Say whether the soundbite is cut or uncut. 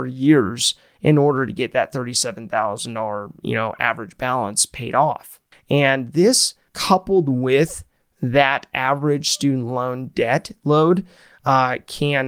cut